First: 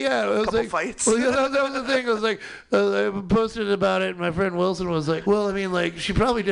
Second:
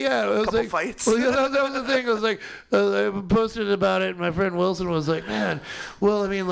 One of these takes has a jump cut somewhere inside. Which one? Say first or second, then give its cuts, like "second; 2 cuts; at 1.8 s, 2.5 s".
first; 1 cut; at 5.2 s